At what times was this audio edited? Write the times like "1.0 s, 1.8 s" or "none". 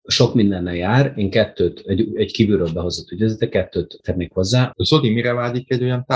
4.7 s